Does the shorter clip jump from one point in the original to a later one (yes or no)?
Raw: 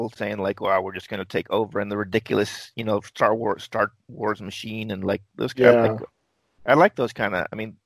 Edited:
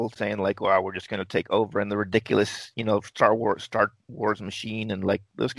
no